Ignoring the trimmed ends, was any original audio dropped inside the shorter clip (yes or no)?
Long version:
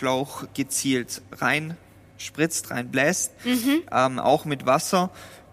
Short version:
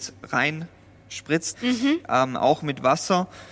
yes